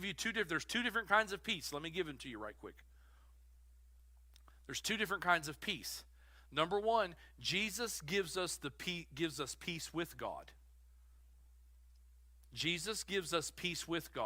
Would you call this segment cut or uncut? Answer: uncut